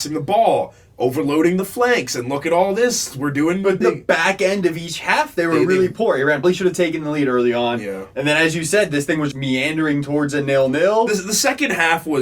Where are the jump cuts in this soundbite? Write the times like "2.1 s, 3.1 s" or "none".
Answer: 3.8 s, 6.4 s, 9.3 s

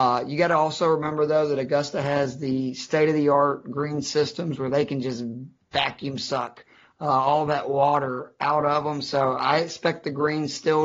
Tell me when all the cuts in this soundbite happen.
none

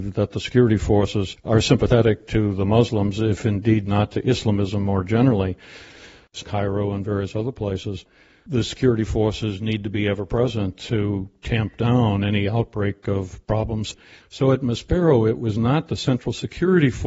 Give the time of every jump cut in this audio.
6.4 s, 14.2 s

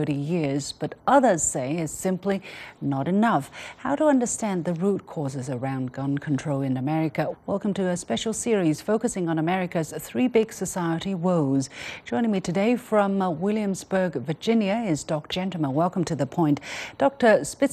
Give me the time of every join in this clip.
7.3 s, 15.3 s

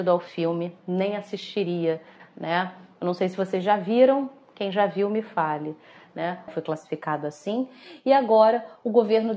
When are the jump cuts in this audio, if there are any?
2.2 s, 6.5 s

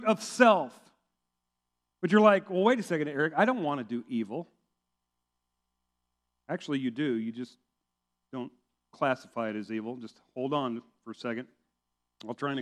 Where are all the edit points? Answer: none

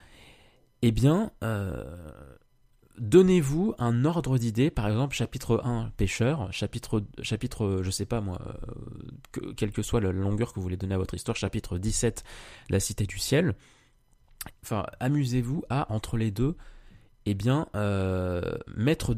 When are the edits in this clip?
14.5 s

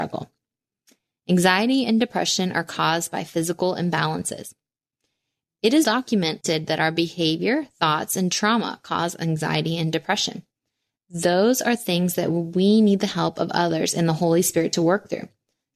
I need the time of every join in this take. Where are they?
5.8 s

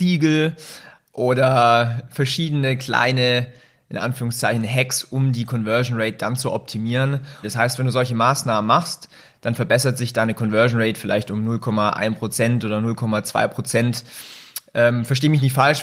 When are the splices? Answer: 7.4 s

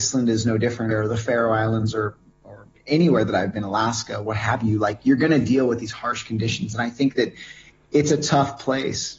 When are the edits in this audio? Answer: 0.9 s

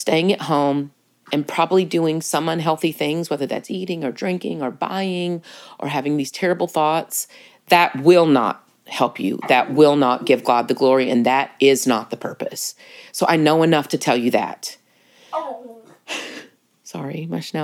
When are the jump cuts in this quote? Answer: 1.2 s

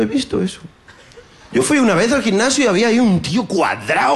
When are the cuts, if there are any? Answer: 1.5 s

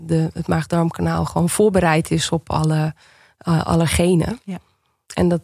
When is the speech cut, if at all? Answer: none

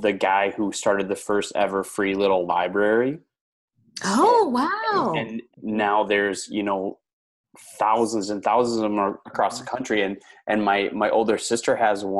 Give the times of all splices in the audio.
5.5 s

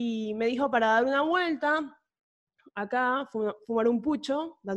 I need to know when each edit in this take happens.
none

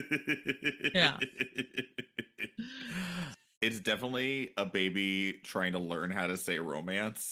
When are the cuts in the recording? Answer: 3.3 s

